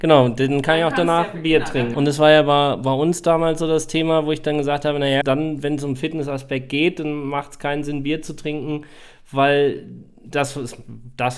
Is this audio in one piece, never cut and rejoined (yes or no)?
no